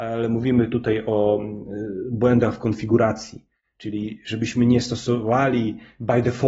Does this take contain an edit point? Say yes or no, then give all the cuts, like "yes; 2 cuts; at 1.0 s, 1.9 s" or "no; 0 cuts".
no; 0 cuts